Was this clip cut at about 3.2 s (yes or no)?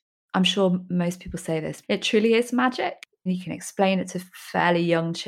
no